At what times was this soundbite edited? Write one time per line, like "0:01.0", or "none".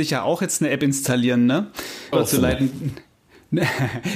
0:02.1